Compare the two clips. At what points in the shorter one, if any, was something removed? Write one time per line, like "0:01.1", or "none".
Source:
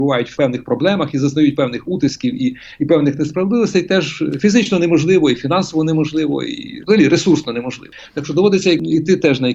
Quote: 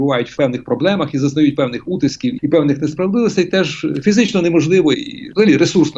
0:02.4
0:04.9